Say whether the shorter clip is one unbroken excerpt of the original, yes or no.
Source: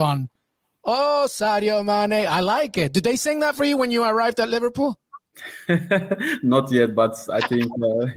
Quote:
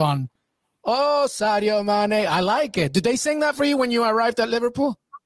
yes